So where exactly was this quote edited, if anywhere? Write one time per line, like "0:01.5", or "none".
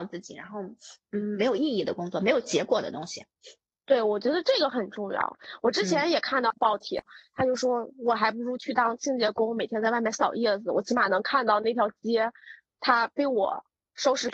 none

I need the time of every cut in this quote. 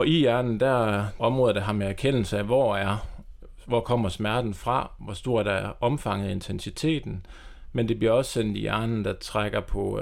0:01.2

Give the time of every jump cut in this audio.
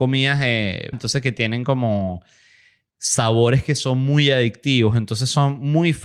0:00.9

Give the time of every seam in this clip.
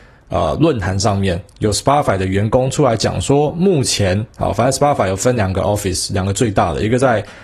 none

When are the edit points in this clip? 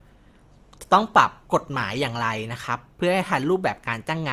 0:01.4

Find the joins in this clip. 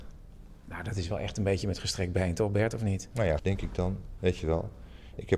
0:03.4

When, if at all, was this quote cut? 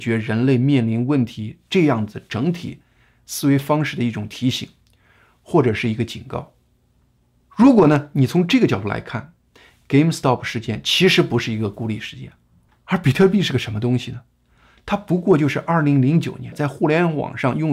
0:12.7
0:16.5

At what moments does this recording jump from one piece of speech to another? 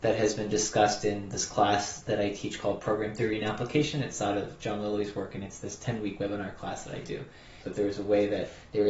0:07.6

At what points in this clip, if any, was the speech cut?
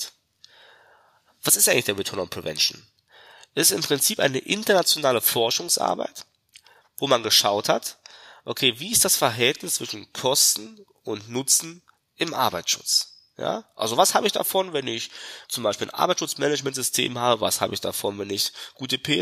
0:15.4

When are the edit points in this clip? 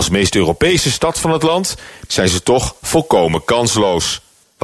0:02.1

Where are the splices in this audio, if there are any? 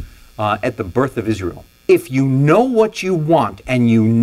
0:01.7

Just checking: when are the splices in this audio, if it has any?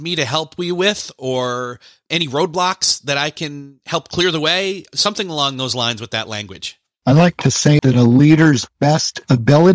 0:07.8

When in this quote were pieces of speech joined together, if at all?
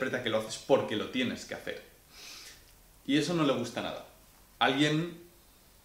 0:04.6

